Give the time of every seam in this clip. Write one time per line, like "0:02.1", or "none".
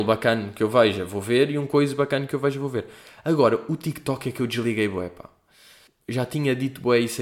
0:05.9